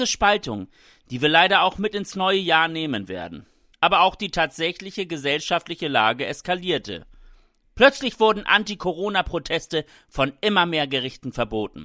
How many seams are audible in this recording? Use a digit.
1